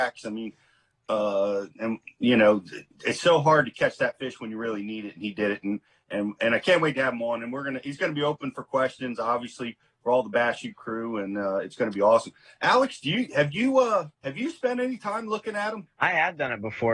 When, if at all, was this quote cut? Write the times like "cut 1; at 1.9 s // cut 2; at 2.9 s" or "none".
cut 1; at 14.1 s // cut 2; at 15.9 s